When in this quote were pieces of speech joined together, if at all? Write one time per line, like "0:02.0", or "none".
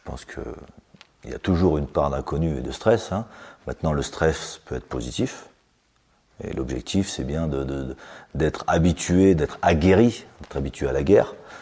none